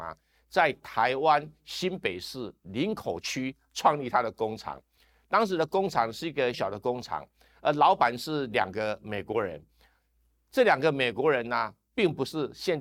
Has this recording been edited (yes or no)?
yes